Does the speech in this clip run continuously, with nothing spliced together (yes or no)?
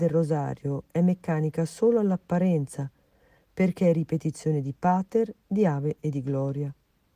yes